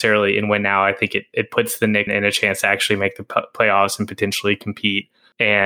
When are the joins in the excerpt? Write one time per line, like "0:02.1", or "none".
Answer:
0:02.1